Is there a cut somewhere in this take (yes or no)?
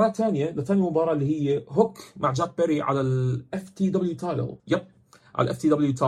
yes